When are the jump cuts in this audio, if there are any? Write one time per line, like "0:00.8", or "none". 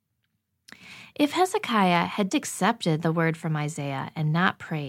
0:02.3